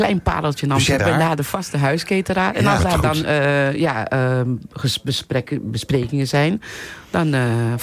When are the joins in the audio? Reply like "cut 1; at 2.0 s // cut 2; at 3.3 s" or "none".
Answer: cut 1; at 1.0 s